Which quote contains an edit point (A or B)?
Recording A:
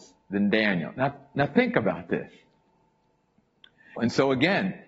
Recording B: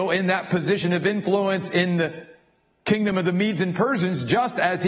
A